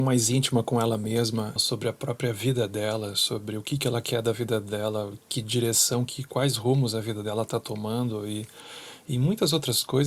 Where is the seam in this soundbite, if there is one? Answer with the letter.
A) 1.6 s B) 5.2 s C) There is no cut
A